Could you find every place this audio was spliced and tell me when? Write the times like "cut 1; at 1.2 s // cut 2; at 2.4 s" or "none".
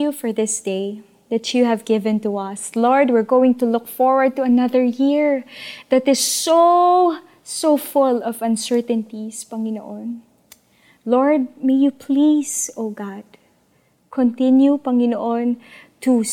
none